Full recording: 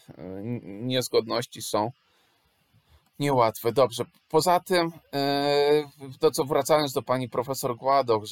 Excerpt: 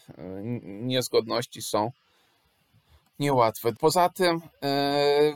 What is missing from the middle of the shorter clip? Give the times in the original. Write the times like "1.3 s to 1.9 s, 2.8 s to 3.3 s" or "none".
3.7 s to 4.2 s